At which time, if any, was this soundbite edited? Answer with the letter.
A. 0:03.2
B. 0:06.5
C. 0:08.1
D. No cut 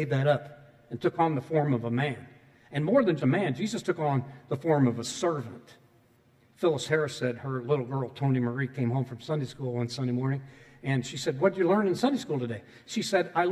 A